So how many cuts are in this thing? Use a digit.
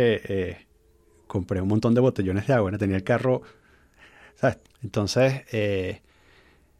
1